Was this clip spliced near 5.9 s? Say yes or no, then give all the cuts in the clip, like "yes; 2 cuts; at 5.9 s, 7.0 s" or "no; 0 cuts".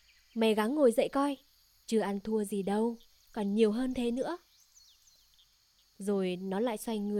no; 1 cut; at 1.8 s